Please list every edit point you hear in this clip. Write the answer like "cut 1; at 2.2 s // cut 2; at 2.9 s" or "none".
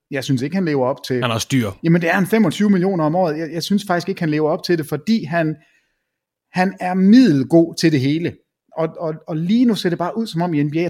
none